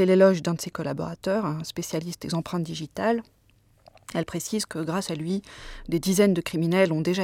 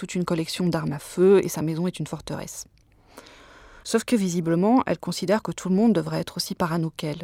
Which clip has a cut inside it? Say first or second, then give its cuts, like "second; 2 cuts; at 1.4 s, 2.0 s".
second; 1 cut; at 3.8 s